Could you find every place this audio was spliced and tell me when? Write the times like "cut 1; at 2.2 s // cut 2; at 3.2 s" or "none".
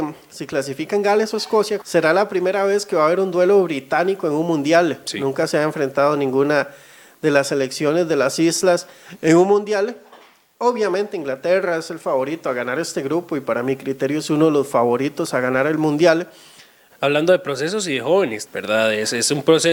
cut 1; at 1.8 s // cut 2; at 16.9 s // cut 3; at 18.5 s